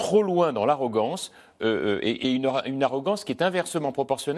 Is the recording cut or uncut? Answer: uncut